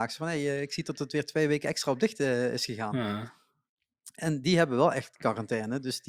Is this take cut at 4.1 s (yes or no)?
no